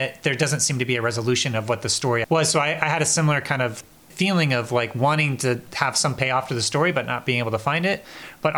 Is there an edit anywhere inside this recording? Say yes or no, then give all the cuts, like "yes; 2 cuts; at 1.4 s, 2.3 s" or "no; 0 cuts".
yes; 1 cut; at 2.2 s